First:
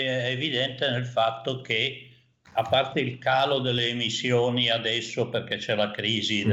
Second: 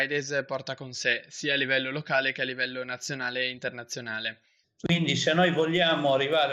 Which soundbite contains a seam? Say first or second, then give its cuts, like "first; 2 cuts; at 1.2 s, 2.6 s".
second; 1 cut; at 4.6 s